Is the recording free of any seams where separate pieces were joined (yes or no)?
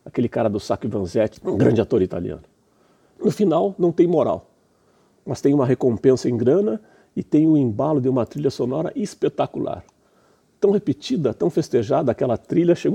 no